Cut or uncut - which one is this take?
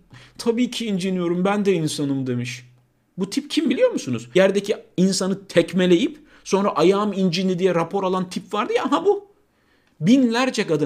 cut